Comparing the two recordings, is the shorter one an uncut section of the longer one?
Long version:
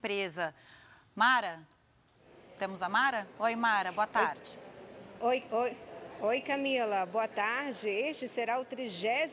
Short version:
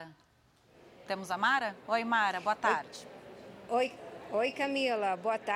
no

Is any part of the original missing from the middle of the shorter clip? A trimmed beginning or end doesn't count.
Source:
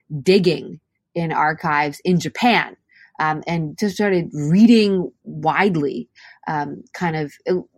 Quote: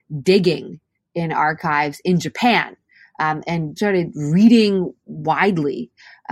yes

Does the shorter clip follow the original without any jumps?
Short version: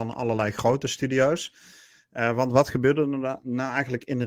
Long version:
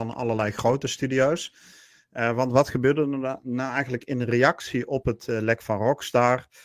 yes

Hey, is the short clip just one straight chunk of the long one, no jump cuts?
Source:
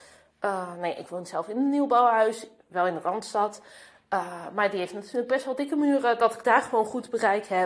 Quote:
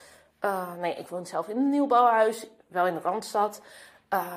yes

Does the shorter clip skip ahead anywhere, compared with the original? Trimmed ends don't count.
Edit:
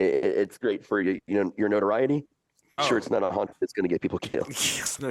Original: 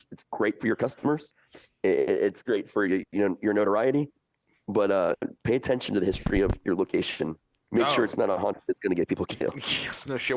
yes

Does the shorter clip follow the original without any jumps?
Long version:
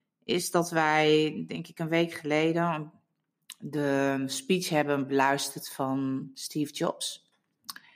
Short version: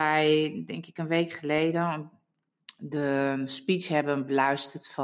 yes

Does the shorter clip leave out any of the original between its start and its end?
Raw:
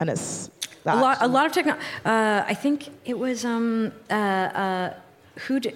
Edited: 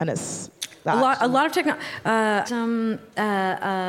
yes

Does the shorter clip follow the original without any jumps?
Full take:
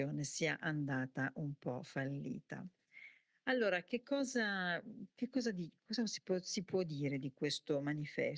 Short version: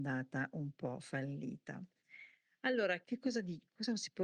no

